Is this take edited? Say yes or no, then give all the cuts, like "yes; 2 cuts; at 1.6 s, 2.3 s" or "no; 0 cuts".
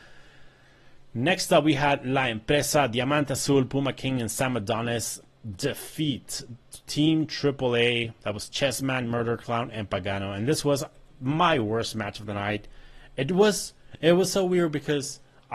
no; 0 cuts